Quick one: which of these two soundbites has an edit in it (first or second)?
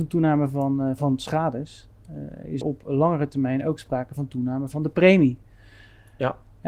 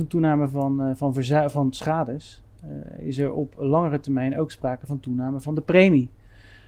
first